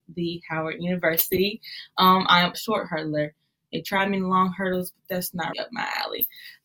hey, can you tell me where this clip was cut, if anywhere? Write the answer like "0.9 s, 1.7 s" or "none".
2.5 s, 5.5 s

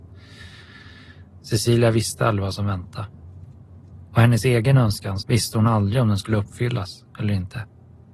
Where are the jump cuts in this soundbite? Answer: 5.2 s

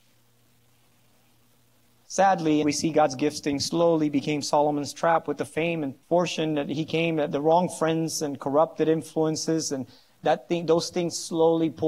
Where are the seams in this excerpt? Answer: 2.6 s, 6.0 s

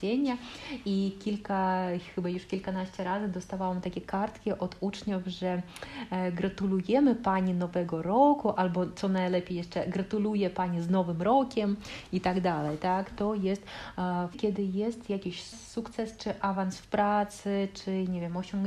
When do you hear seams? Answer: 13.1 s, 14.3 s

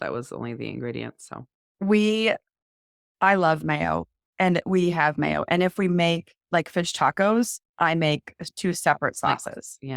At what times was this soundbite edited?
7.7 s

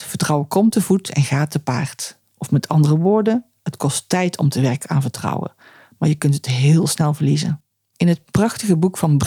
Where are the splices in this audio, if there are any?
7.9 s

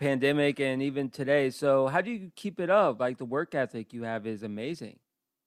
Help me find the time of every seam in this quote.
none

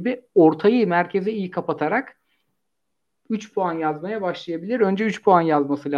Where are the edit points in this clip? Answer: none

